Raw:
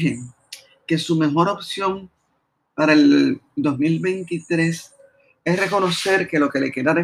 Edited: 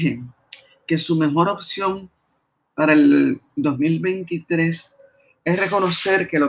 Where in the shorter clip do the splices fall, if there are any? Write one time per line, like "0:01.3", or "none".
none